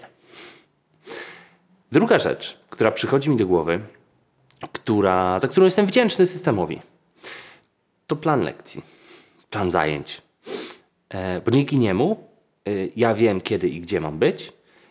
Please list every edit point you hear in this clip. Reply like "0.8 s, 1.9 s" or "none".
none